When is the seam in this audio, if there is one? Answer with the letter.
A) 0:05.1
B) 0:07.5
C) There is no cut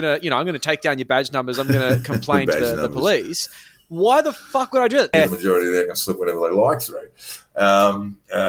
A